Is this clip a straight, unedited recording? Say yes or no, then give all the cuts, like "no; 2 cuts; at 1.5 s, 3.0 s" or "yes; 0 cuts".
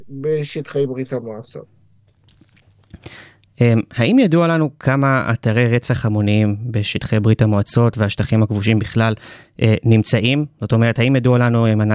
yes; 0 cuts